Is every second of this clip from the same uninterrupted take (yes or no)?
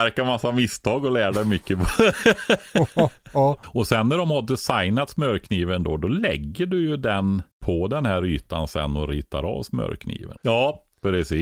no